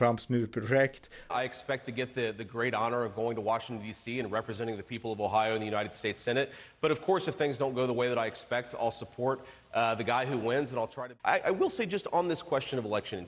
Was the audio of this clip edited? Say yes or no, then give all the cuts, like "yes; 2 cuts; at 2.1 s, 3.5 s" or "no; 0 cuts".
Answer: yes; 1 cut; at 1.3 s